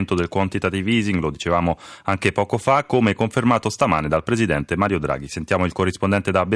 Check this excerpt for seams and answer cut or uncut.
uncut